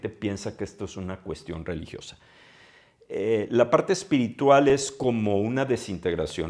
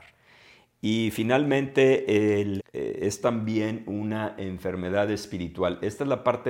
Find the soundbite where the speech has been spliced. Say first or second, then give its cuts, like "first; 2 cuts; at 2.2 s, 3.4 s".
second; 1 cut; at 2.6 s